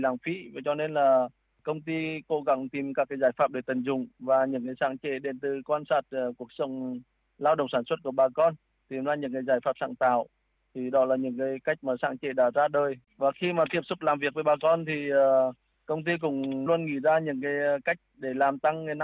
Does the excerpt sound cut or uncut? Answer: cut